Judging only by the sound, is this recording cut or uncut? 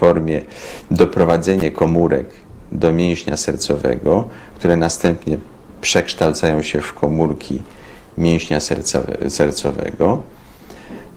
uncut